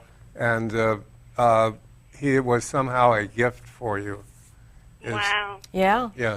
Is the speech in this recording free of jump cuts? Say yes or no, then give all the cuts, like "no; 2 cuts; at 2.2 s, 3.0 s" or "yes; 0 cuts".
yes; 0 cuts